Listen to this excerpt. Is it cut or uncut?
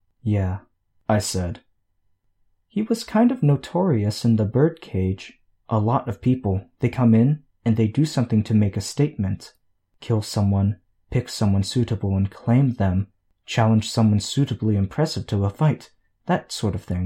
uncut